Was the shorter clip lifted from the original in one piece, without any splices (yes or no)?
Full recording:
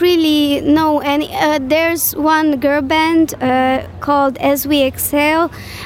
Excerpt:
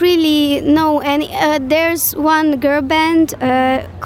yes